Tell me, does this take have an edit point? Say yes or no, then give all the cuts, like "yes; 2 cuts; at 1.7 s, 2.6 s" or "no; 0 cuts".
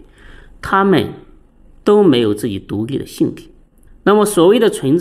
yes; 1 cut; at 3.9 s